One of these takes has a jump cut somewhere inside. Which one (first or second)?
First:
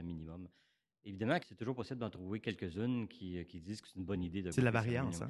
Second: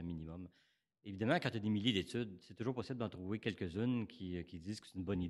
first